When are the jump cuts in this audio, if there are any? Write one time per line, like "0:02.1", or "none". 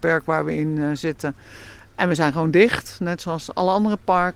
none